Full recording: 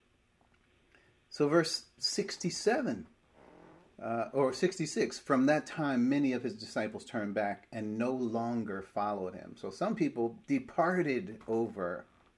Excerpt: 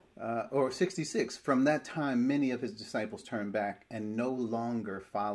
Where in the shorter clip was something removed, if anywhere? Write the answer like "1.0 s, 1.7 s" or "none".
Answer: none